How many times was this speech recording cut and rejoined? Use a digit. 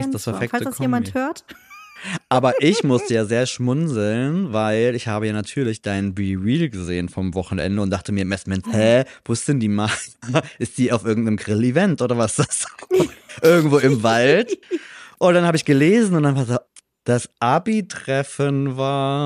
1